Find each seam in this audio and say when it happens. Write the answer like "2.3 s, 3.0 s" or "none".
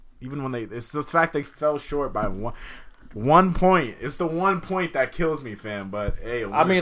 none